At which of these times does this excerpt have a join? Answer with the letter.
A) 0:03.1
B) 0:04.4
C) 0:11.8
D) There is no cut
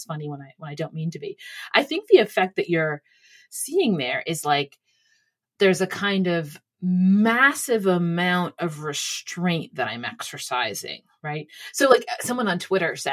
D